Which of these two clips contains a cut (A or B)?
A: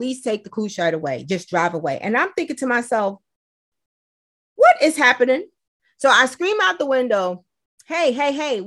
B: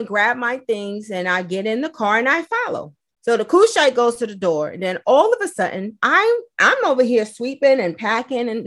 B